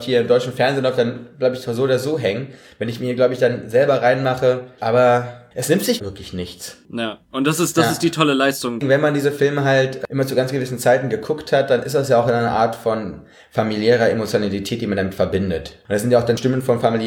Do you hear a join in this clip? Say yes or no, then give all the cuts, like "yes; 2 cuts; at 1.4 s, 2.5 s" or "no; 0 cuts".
yes; 2 cuts; at 4.8 s, 6.0 s